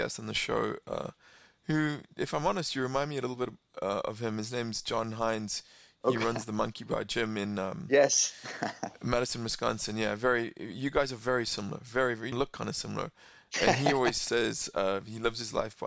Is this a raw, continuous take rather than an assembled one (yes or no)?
no